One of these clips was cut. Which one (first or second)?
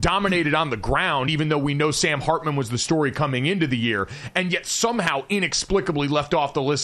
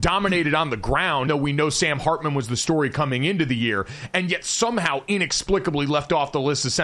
second